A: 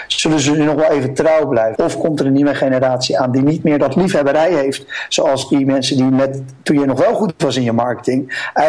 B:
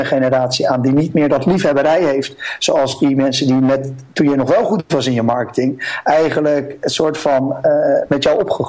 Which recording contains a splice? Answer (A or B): A